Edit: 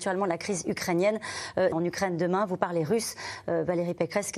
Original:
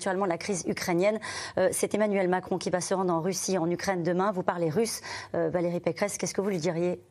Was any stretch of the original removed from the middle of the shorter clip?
yes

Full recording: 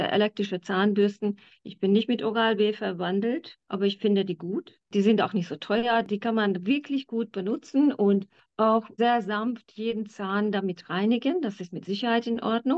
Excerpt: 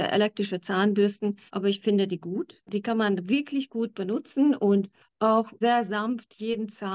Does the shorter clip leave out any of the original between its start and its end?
yes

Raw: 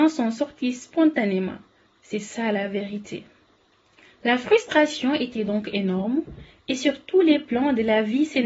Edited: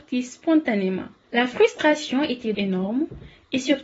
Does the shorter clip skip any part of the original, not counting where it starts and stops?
yes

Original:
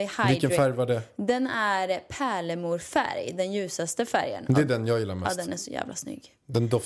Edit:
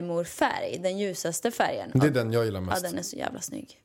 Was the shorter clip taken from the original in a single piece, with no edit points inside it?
yes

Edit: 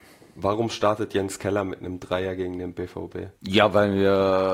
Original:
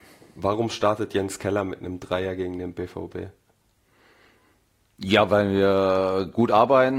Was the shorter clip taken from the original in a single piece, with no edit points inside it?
no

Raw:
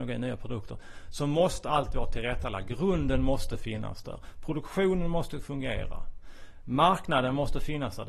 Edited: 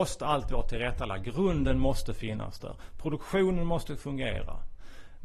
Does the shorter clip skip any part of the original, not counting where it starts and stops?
no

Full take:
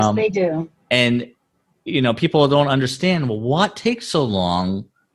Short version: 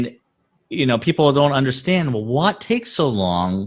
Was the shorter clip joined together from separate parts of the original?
no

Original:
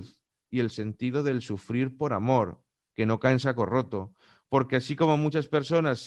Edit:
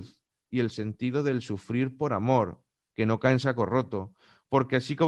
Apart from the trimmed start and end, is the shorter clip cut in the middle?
no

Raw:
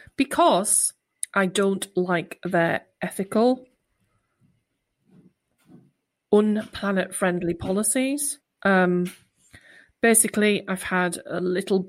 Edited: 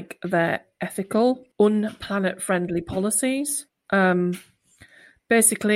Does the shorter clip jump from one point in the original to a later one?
yes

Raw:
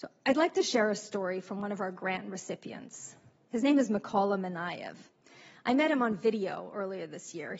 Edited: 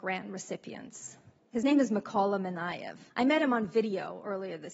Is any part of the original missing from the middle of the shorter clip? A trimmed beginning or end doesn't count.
yes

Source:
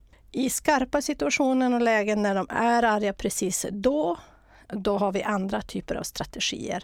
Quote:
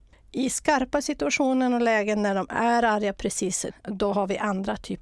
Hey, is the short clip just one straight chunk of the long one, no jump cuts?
no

